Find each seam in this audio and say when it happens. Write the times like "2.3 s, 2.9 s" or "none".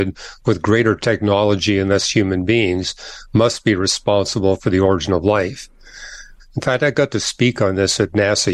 6.4 s

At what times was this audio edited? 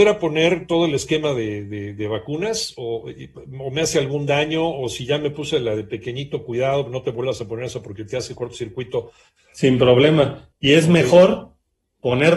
9.4 s, 10.5 s

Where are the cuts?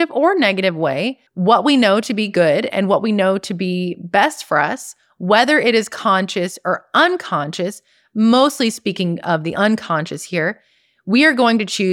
1.3 s

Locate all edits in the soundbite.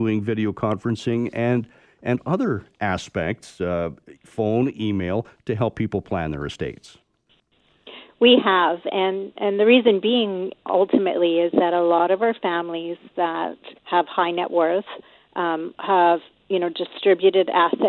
13.8 s

